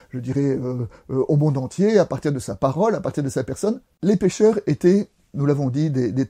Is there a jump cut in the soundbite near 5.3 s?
no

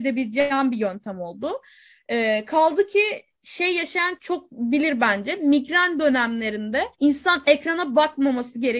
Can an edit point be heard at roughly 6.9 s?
yes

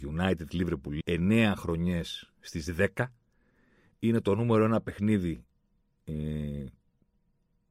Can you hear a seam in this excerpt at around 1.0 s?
yes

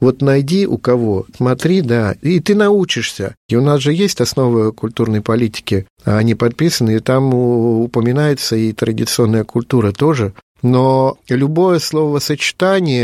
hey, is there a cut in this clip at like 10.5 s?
no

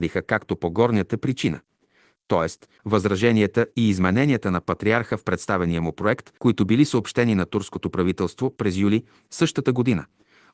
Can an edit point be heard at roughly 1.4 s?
no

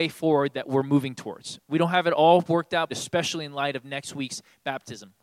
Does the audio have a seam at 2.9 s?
yes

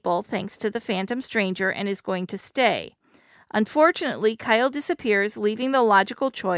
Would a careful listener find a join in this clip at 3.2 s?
no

